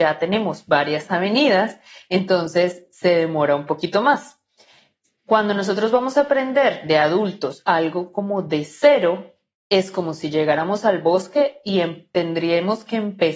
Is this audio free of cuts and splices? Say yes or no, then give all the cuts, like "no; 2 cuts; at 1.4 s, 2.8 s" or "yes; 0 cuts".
yes; 0 cuts